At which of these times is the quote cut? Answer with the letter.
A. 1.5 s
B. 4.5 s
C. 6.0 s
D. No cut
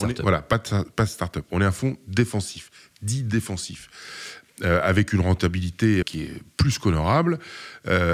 C